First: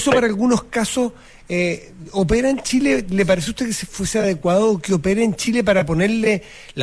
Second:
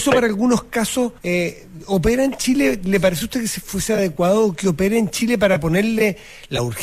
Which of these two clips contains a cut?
second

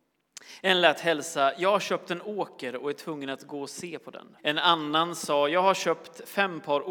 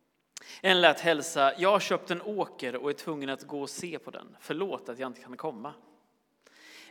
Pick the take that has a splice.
first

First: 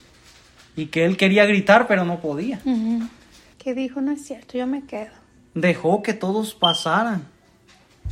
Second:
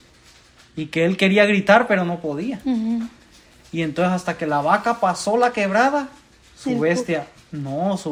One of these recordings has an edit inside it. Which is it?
first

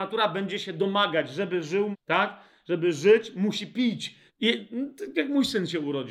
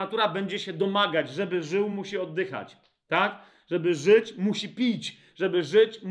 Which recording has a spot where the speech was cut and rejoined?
first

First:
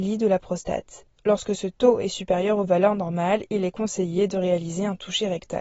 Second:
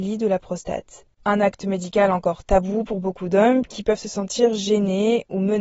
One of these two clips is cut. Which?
second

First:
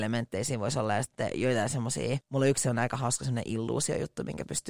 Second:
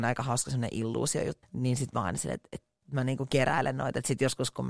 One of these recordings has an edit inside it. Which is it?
second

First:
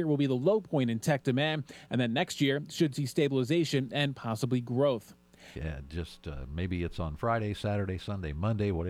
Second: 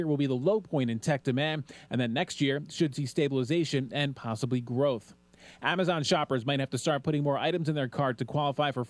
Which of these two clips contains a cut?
first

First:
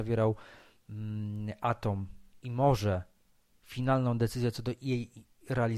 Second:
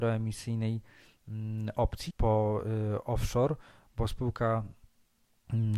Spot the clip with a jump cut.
second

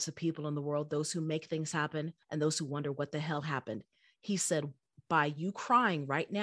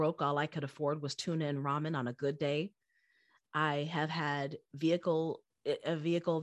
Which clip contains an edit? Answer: first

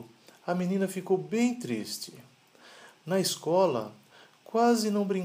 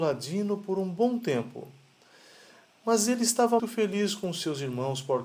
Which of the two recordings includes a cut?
second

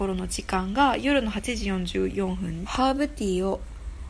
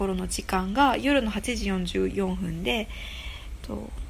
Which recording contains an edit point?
first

